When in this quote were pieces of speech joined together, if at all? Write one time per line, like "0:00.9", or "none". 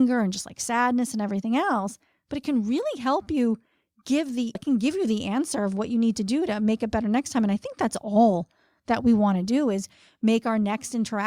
0:04.6